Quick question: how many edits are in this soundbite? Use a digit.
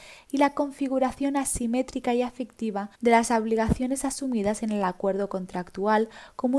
1